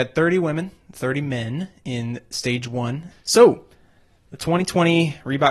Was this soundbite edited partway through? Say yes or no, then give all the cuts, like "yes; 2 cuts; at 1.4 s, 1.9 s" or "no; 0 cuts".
yes; 1 cut; at 3.1 s